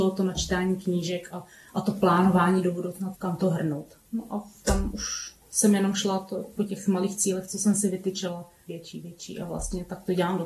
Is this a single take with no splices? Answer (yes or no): no